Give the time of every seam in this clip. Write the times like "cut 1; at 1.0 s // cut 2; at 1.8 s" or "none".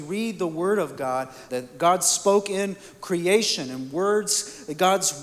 cut 1; at 1.5 s